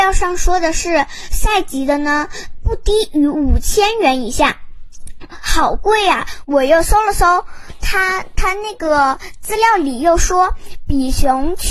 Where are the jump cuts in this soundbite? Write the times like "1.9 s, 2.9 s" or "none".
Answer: 6.4 s